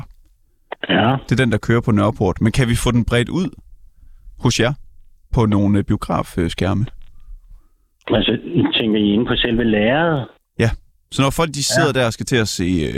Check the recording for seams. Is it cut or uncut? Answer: uncut